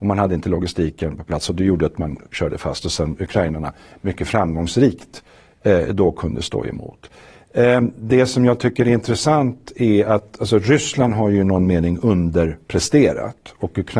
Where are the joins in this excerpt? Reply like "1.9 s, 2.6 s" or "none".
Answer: none